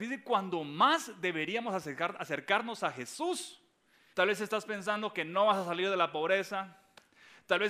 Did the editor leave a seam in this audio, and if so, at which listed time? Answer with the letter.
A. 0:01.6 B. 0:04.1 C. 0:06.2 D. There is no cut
B